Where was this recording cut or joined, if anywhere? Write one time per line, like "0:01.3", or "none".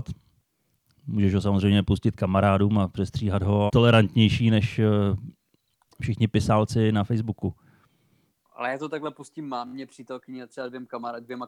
0:03.7
0:08.5